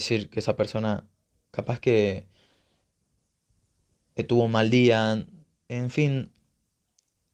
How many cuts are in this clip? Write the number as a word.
zero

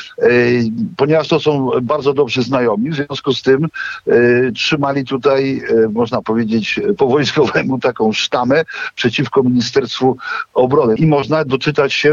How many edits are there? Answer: one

